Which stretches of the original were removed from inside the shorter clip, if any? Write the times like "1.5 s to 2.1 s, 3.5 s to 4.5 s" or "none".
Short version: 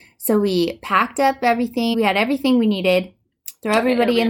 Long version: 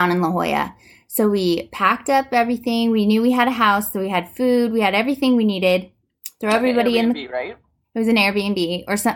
2.8 s to 4.7 s